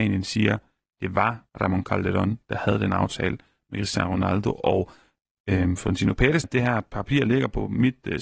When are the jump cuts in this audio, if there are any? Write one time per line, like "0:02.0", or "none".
0:01.5
0:06.4